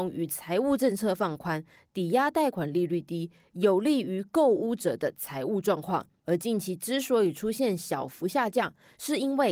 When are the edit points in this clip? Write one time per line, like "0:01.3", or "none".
0:06.2